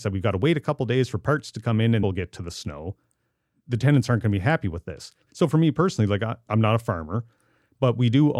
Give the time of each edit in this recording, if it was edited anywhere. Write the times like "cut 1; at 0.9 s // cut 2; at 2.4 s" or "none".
cut 1; at 2.0 s // cut 2; at 5.2 s // cut 3; at 6.5 s